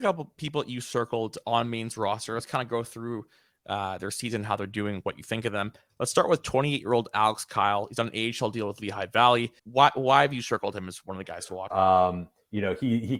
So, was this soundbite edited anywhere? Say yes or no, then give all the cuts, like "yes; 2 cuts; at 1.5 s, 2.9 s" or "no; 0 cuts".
yes; 2 cuts; at 9.6 s, 11.7 s